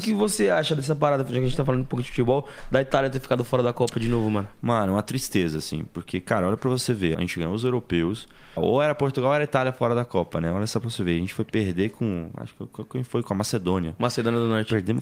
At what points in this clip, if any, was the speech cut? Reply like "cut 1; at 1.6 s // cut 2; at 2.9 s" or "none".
cut 1; at 7.1 s // cut 2; at 8.6 s